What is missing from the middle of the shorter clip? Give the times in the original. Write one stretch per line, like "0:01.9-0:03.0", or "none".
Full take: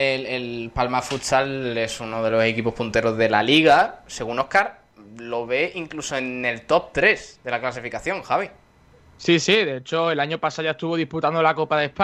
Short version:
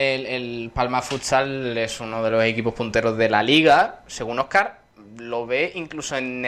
none